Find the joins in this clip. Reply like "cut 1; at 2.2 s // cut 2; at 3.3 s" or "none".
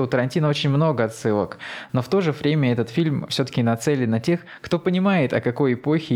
cut 1; at 1.9 s